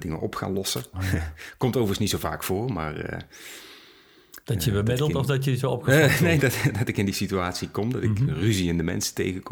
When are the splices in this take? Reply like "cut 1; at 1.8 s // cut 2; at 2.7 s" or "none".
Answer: none